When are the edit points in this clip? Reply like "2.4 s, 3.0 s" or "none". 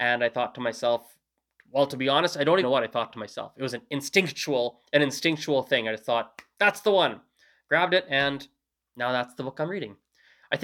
2.6 s